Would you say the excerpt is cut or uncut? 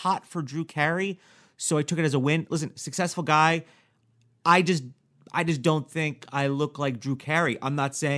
uncut